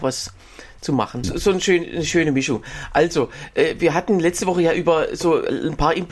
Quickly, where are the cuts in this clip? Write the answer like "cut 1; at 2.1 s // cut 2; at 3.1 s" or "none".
cut 1; at 1.2 s